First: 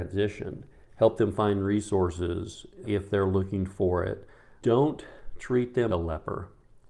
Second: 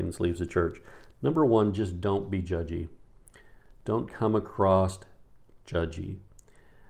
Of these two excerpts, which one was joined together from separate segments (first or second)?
first